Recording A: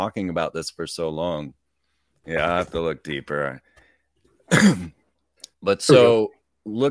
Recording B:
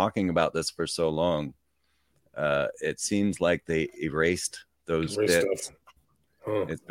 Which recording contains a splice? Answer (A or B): A